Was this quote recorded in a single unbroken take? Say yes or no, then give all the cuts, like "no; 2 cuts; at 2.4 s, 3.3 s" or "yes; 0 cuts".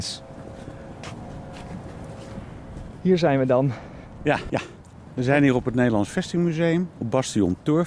no; 1 cut; at 4.5 s